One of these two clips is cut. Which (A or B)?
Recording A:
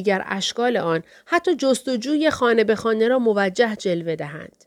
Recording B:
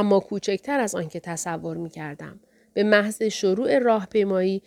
B